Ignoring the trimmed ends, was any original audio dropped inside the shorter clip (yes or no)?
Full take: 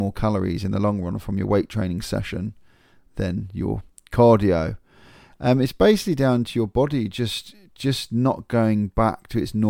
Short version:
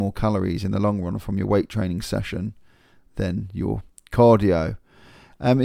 no